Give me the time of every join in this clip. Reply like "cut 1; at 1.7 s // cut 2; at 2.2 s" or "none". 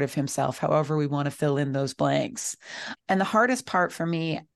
cut 1; at 3.0 s